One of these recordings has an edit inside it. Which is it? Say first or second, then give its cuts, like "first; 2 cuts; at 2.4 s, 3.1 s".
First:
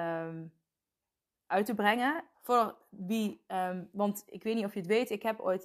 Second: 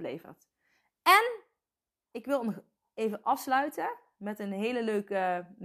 first; 1 cut; at 2.3 s